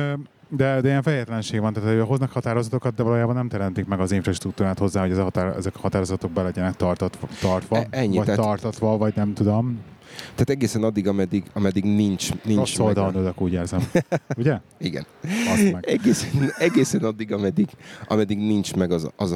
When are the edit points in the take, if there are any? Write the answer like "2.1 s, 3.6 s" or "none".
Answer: none

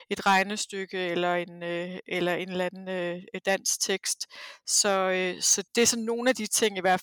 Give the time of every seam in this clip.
5.7 s

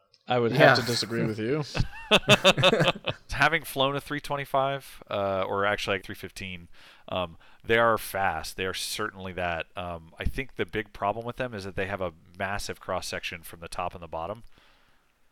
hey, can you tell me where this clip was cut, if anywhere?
6.0 s

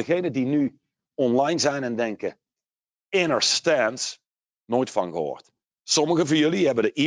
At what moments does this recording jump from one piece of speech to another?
5.7 s

